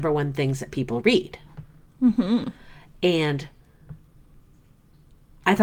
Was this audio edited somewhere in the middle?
no; 0 cuts

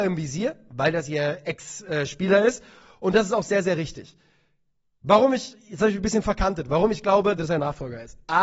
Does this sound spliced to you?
yes; 1 cut; at 7.4 s

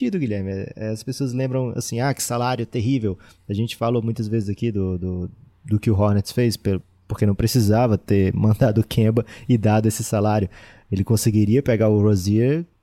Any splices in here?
no; 0 cuts

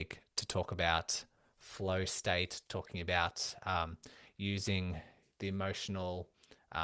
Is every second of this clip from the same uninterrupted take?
no; 2 cuts; at 2.6 s, 5.3 s

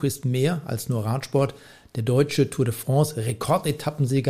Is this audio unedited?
yes; 0 cuts

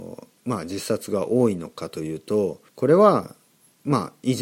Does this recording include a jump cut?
yes; 1 cut; at 2.7 s

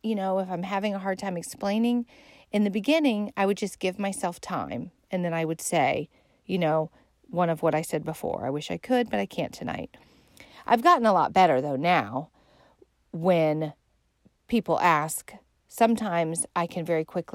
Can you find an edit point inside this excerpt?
no; 0 cuts

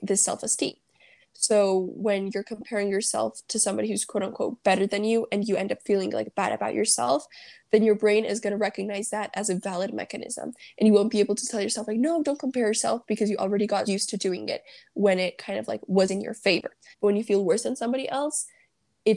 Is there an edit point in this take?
yes; 3 cuts; at 1.2 s, 13.9 s, 16.9 s

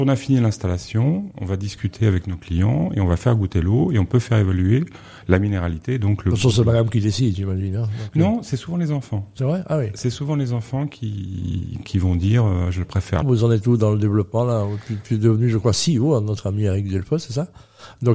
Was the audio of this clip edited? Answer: yes; 1 cut; at 13.2 s

